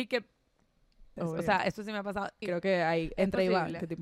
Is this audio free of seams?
no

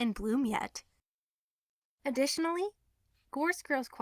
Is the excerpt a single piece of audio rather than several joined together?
yes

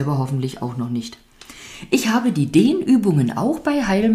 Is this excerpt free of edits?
yes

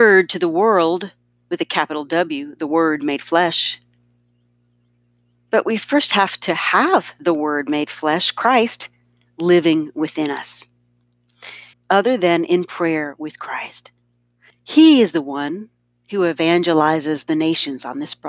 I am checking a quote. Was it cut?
yes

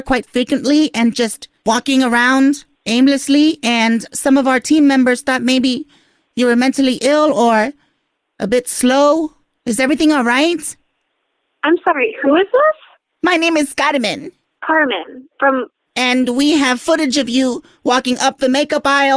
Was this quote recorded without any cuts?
yes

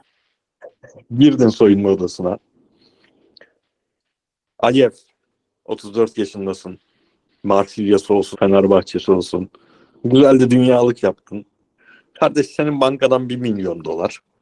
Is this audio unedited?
no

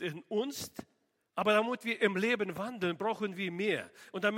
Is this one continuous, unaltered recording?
no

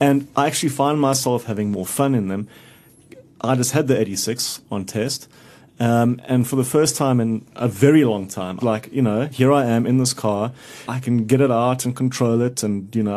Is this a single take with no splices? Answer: no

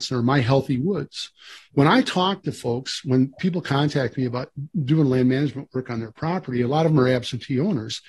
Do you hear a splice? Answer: yes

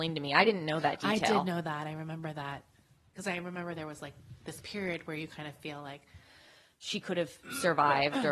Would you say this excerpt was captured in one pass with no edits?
yes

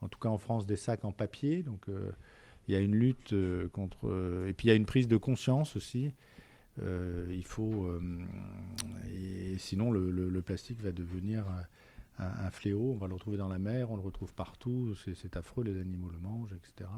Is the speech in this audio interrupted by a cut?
no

